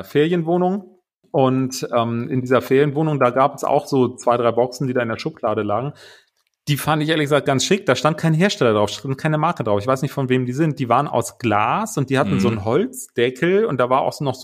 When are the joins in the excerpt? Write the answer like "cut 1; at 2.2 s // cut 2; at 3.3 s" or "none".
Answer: none

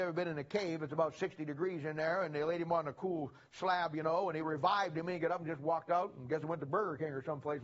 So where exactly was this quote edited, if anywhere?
none

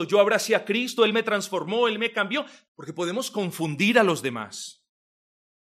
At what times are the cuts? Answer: cut 1; at 1.0 s // cut 2; at 2.7 s

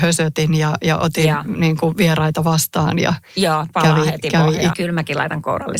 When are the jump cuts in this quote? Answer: cut 1; at 4.7 s

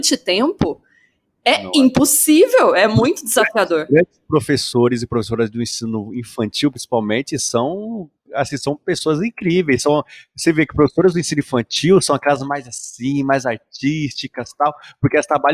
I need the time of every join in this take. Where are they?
none

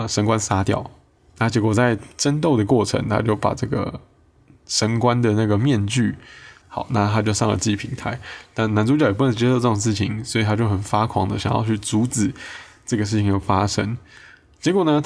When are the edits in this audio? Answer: cut 1; at 6.6 s

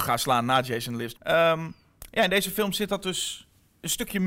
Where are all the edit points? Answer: cut 1; at 1.1 s

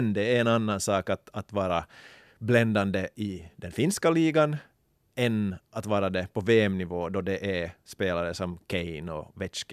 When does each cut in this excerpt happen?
none

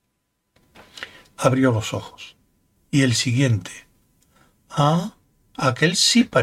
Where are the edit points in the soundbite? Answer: cut 1; at 2.8 s

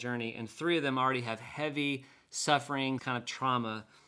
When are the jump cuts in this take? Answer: cut 1; at 3.0 s

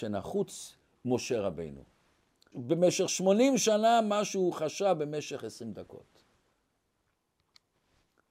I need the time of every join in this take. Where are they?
cut 1; at 2.5 s

